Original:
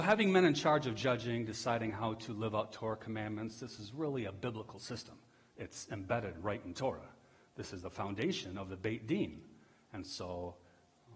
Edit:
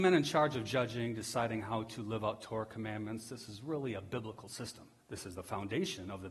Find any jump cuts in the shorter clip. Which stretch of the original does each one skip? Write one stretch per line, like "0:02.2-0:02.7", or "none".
0:05.3-0:07.5